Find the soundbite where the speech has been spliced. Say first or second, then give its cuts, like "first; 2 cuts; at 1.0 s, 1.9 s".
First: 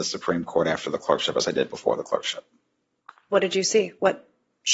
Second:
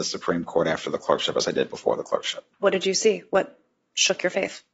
second; 1 cut; at 2.5 s